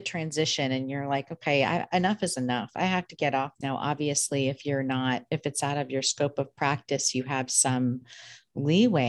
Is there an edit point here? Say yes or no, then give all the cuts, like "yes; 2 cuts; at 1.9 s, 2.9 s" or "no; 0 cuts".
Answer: yes; 1 cut; at 3.6 s